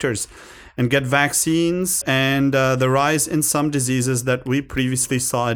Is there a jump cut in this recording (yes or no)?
yes